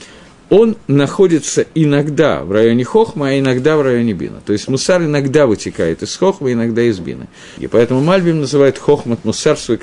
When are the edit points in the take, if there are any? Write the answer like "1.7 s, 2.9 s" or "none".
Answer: 7.6 s